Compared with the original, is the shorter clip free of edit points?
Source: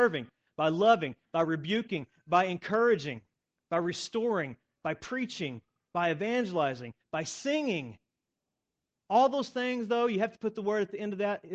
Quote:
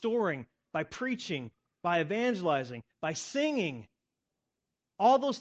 yes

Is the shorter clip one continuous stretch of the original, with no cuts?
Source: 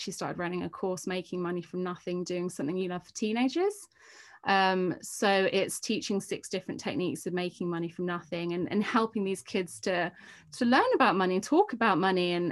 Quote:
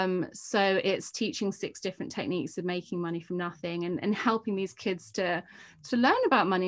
yes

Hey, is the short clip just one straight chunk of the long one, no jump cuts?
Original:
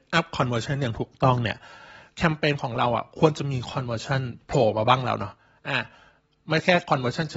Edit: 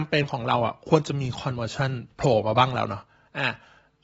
yes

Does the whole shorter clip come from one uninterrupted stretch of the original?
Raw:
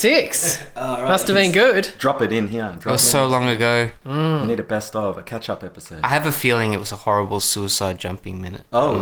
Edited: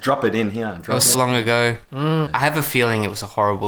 no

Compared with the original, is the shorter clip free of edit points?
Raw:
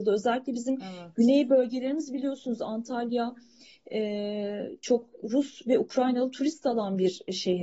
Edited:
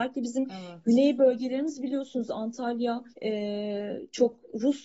no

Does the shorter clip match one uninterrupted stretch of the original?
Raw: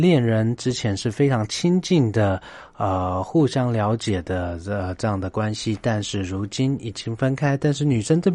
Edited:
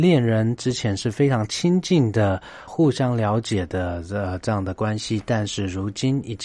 no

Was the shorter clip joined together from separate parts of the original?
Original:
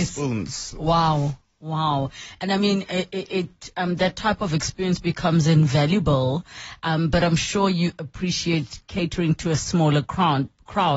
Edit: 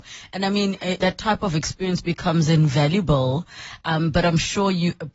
yes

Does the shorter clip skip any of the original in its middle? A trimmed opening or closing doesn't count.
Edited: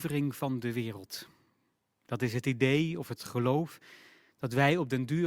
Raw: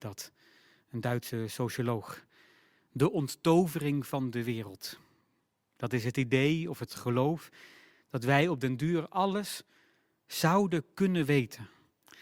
no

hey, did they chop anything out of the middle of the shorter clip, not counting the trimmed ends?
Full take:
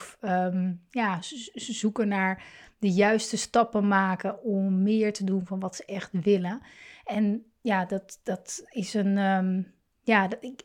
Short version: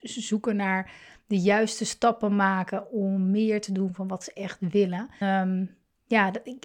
yes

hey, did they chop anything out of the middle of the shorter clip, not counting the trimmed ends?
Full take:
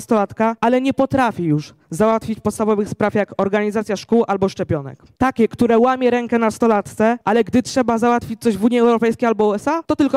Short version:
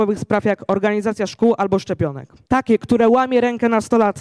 no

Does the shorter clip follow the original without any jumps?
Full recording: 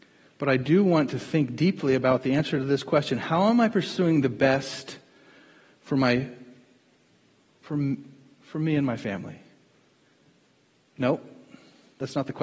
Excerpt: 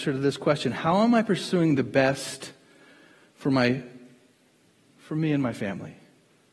no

